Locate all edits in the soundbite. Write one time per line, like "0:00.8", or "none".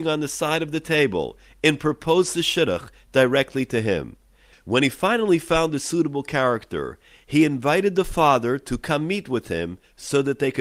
0:04.5

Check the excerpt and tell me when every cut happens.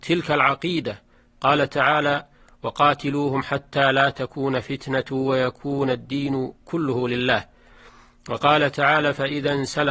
none

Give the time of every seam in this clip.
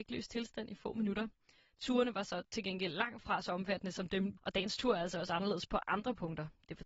0:04.4

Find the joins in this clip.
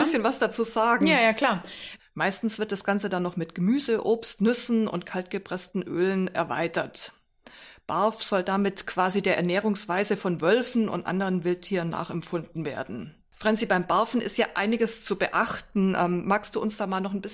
0:02.0

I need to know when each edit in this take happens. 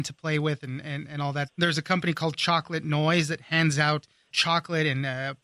0:01.5

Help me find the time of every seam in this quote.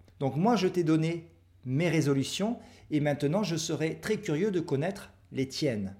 none

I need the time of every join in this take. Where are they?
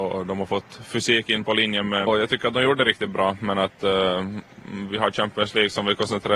0:02.1

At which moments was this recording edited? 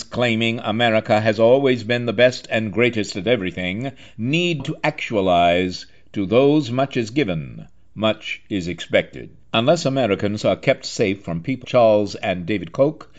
0:04.6
0:09.4
0:11.6

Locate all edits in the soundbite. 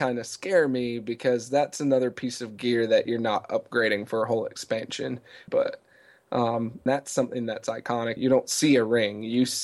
0:05.5
0:06.9
0:08.2

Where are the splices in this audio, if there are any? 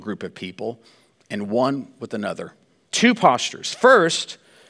0:02.9

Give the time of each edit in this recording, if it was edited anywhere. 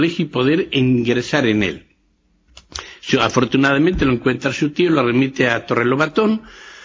none

